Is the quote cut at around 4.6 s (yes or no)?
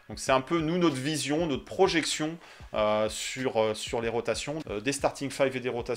yes